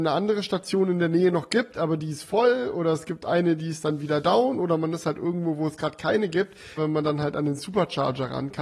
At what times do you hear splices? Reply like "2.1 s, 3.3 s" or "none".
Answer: 6.8 s